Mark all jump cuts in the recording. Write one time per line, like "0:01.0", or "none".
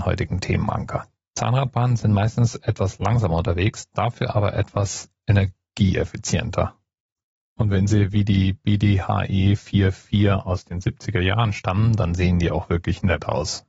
0:01.3